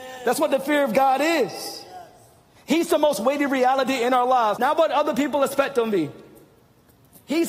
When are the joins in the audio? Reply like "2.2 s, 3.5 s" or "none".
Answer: 4.6 s